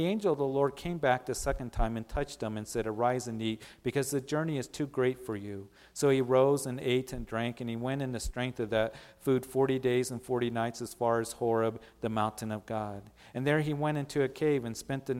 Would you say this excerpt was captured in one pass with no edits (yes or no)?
yes